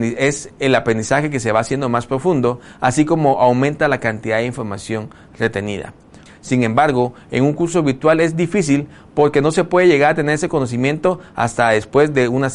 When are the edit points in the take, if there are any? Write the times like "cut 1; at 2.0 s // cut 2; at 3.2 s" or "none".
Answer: cut 1; at 6.3 s